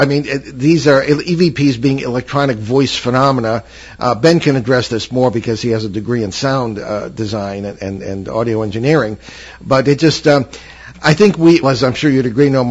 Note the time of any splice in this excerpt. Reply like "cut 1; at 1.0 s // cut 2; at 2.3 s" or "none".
cut 1; at 11.6 s